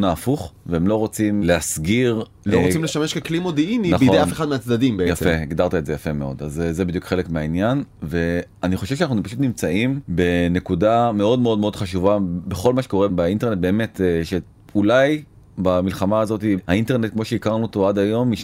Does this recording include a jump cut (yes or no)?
no